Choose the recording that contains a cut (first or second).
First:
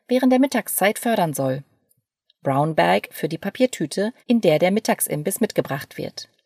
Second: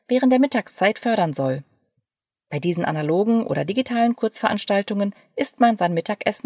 first